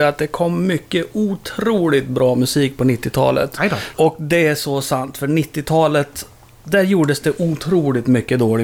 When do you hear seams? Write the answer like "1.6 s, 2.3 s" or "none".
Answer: 3.9 s